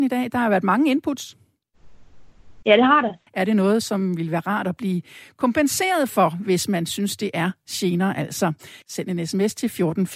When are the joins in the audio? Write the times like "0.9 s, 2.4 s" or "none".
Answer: 3.3 s, 8.8 s